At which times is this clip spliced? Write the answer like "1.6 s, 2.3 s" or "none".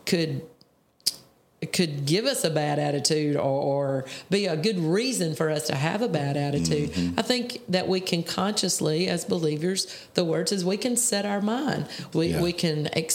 12.1 s